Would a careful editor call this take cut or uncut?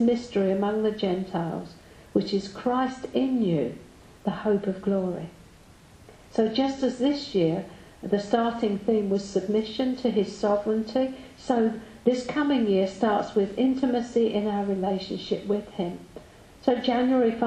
uncut